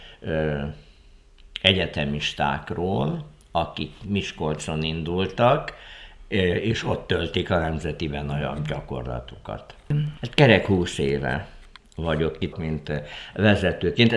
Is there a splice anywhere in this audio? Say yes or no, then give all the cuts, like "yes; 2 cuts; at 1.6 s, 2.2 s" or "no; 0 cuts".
yes; 2 cuts; at 10.2 s, 12.5 s